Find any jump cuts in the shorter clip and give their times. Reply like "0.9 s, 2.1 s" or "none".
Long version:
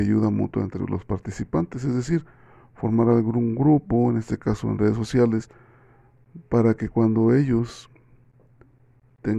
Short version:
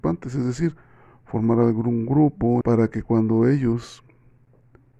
2.6 s